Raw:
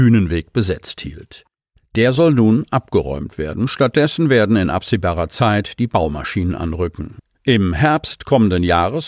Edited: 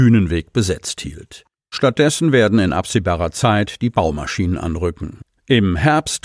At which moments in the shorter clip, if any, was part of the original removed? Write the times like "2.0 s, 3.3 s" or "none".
1.7 s